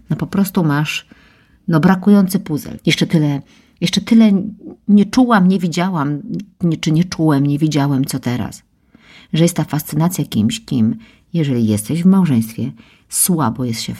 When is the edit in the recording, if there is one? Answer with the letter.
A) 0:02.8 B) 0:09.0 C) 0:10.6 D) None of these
A